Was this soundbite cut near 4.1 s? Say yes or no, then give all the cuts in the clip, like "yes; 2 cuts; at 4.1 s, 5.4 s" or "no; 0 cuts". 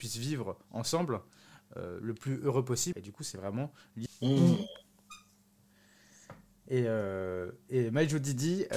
yes; 2 cuts; at 2.9 s, 4.1 s